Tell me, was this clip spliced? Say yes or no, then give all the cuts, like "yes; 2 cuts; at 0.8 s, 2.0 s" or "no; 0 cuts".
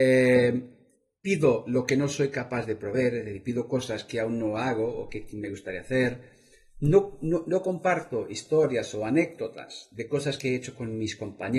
no; 0 cuts